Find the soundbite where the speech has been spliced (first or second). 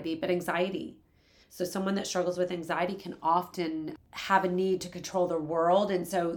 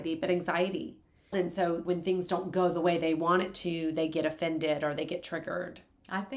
second